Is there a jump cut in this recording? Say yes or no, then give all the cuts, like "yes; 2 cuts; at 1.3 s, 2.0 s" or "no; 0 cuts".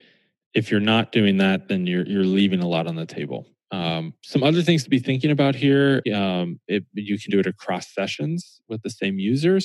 yes; 2 cuts; at 6.0 s, 7.3 s